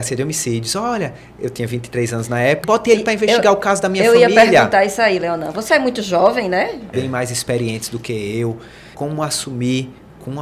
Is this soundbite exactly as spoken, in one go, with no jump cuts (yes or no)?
no